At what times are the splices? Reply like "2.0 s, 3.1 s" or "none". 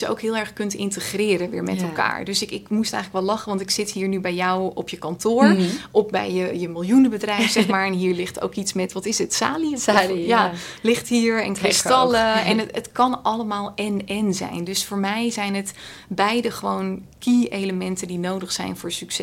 none